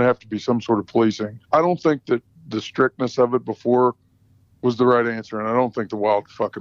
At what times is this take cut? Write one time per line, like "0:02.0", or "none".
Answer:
0:01.4